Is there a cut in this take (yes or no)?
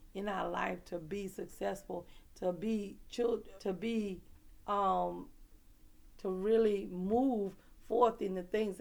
yes